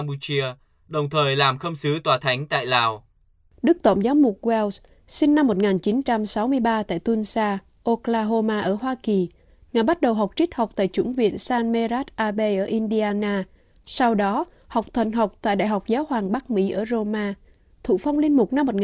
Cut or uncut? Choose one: uncut